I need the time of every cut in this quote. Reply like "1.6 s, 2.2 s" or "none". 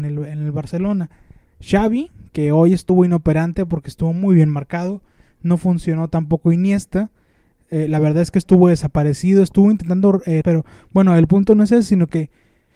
10.4 s